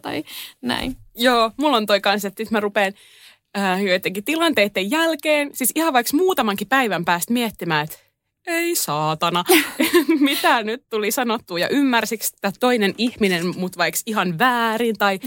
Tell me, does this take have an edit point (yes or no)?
no